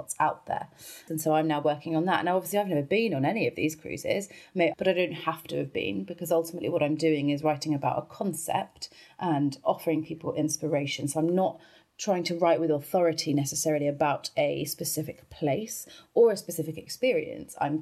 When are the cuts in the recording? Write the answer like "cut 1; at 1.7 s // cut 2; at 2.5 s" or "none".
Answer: cut 1; at 1.1 s // cut 2; at 4.7 s